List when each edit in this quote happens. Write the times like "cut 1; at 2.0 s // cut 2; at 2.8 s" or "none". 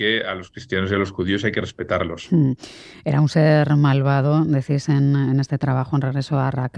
none